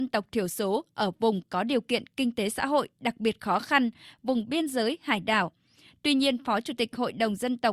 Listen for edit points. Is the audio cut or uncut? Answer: uncut